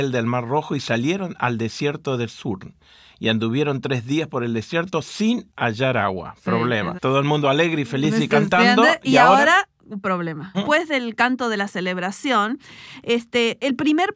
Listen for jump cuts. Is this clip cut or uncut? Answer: cut